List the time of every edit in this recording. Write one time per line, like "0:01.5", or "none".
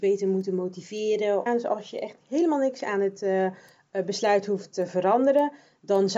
0:01.5